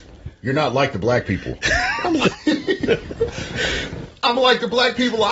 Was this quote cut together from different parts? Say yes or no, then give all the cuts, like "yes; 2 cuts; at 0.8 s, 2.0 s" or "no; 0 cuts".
no; 0 cuts